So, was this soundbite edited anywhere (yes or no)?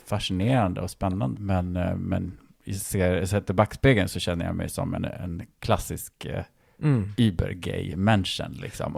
yes